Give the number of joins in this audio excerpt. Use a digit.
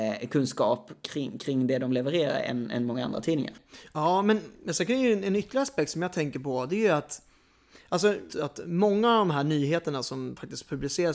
1